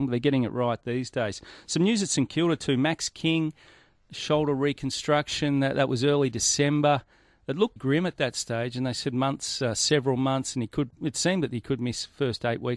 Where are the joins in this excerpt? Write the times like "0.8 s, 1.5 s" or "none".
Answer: 7.8 s